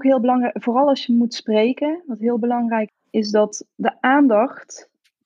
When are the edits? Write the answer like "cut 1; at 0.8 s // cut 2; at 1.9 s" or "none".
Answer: cut 1; at 2.9 s